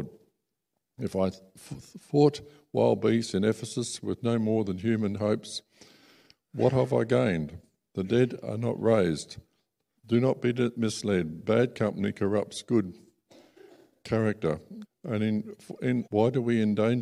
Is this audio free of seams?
no; 3 cuts; at 10.0 s, 14.8 s, 16.1 s

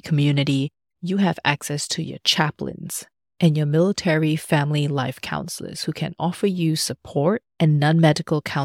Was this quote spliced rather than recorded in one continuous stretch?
no; 0 cuts

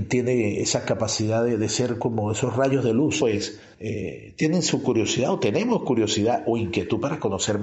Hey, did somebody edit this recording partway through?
yes; 1 cut; at 3.2 s

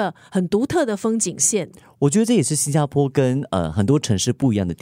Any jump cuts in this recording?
no; 0 cuts

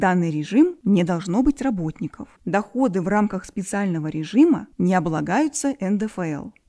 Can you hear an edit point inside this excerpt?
yes; 1 cut; at 2.4 s

